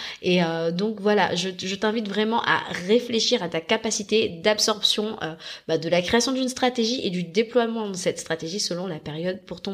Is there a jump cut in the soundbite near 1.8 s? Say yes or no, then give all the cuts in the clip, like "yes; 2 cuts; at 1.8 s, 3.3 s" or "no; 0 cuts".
no; 0 cuts